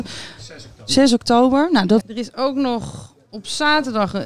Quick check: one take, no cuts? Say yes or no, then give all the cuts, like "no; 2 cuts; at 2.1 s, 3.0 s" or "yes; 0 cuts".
no; 1 cut; at 2.0 s